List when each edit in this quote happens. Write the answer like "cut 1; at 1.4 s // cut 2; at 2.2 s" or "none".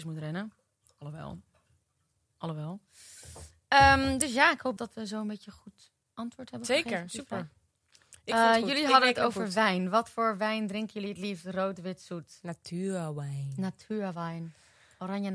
cut 1; at 4.8 s